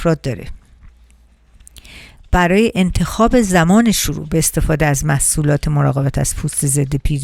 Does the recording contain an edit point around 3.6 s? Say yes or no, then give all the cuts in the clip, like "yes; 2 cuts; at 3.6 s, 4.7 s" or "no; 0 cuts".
no; 1 cut; at 2.2 s